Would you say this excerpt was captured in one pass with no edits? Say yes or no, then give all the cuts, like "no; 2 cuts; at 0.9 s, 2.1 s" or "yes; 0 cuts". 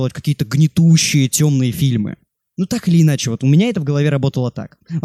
yes; 0 cuts